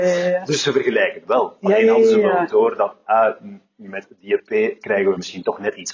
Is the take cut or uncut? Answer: uncut